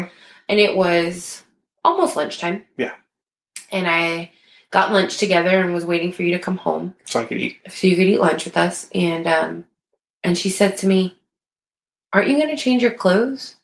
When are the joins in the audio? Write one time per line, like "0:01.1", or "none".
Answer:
none